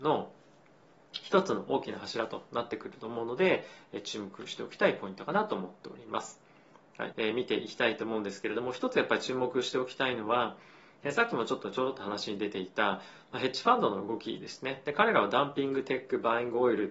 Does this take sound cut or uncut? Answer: cut